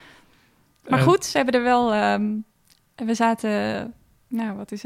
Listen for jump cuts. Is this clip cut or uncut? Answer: uncut